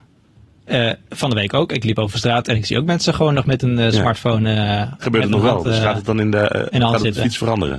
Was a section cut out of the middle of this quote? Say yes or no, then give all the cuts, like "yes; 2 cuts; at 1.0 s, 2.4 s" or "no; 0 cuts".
yes; 1 cut; at 5.0 s